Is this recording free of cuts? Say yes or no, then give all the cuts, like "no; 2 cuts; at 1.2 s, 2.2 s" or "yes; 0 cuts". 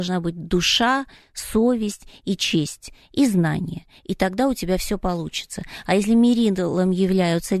yes; 0 cuts